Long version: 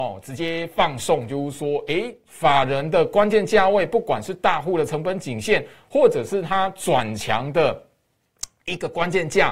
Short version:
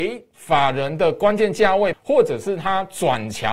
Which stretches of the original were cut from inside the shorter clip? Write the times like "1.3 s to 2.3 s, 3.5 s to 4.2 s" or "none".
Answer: 3.9 s to 5.8 s